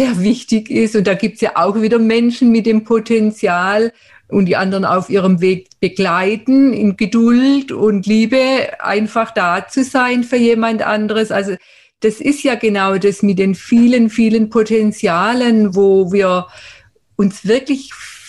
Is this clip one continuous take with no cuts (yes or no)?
no